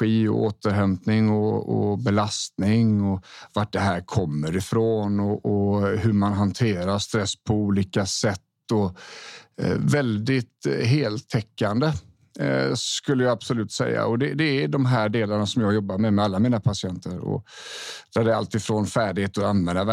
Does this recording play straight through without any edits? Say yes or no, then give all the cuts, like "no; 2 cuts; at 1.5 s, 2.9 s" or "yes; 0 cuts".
yes; 0 cuts